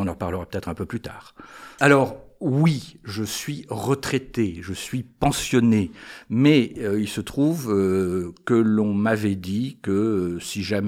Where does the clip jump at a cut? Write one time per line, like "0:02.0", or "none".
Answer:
0:01.8